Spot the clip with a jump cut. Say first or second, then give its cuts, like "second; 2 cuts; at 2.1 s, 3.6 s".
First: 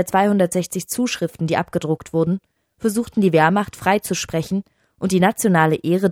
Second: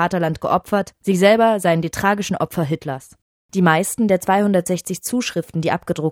second; 2 cuts; at 1.0 s, 3.4 s